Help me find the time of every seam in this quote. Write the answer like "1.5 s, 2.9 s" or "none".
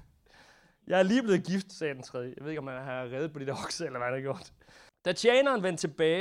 4.9 s